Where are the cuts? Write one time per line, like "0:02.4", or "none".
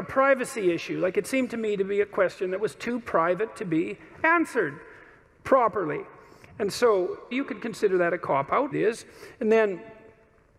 0:07.3
0:08.7